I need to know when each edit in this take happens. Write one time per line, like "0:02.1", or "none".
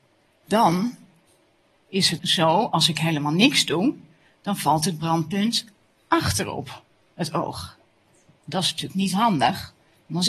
0:02.2